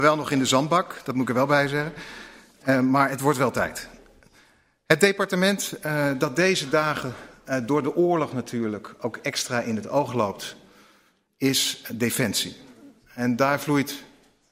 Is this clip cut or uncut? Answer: uncut